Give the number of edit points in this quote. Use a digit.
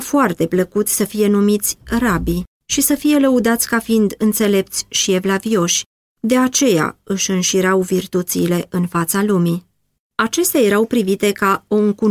0